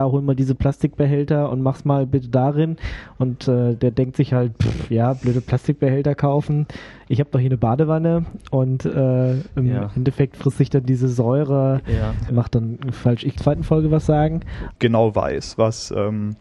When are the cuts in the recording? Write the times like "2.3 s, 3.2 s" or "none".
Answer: 12.3 s, 13.4 s, 14.8 s